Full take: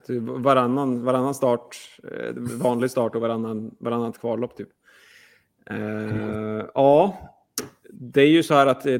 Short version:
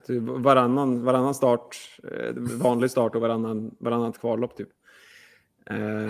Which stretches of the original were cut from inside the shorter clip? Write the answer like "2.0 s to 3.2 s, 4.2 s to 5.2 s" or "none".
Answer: none